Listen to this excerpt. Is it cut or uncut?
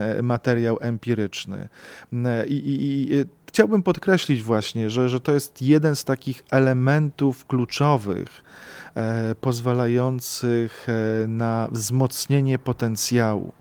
uncut